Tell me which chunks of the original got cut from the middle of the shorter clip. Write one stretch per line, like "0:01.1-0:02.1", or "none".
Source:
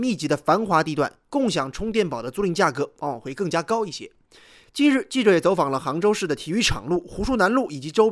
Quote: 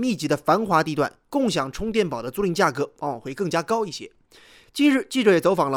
none